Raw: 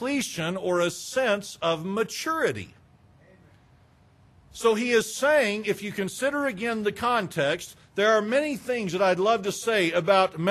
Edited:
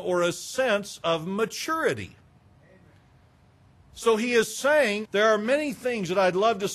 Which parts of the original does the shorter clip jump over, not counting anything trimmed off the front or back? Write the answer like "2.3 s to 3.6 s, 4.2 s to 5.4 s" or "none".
5.6 s to 7.9 s